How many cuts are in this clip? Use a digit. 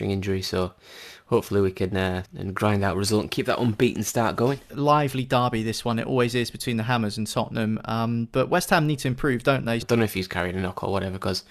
3